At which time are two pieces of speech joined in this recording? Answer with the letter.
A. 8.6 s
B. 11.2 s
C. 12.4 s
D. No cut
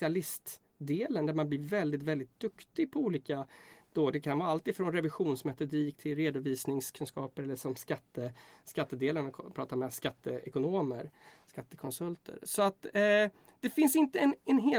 D